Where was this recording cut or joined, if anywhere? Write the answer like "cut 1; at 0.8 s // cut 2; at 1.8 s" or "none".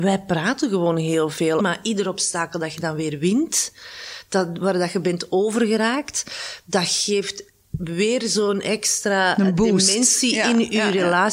cut 1; at 1.6 s